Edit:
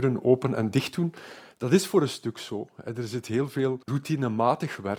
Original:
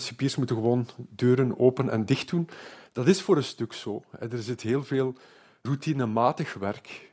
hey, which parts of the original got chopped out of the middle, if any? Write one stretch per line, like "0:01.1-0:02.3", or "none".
0:05.2-0:05.6